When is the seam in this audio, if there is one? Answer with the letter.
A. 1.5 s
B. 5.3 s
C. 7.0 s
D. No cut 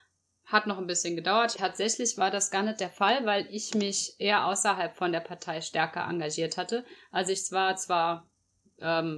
A